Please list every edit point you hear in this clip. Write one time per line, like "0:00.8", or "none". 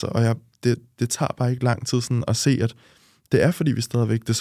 none